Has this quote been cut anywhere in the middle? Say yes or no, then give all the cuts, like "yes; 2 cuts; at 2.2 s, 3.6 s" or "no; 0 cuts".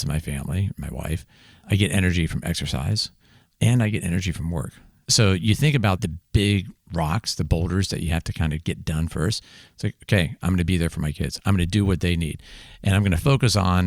no; 0 cuts